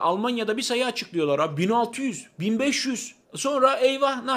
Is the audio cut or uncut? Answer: cut